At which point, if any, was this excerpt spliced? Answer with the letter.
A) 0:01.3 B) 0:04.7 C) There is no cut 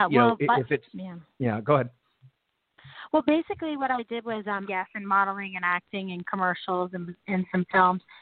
B